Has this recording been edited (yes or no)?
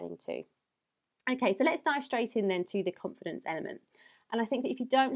yes